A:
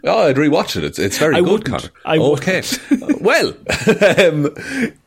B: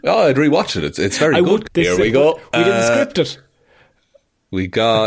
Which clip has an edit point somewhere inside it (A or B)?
B